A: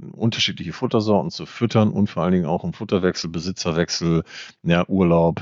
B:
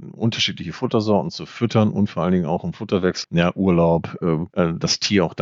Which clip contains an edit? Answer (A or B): B